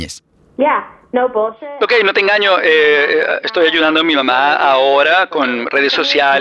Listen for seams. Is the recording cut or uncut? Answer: uncut